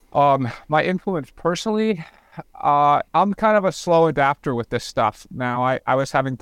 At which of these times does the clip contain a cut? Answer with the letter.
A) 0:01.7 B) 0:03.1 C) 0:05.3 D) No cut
B